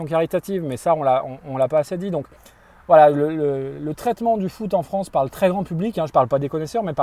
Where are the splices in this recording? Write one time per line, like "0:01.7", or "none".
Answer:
none